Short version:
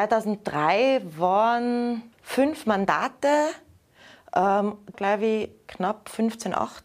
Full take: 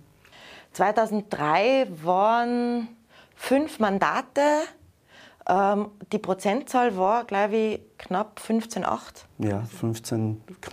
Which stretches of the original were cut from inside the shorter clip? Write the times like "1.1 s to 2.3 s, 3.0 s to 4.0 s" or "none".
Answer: 3.0 s to 3.3 s, 6.1 s to 7.2 s